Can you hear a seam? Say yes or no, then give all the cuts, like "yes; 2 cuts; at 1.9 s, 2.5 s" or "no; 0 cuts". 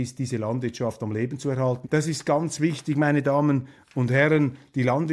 yes; 1 cut; at 1.8 s